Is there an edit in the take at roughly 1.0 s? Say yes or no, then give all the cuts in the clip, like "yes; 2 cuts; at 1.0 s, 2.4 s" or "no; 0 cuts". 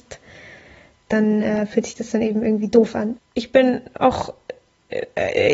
no; 1 cut; at 3.2 s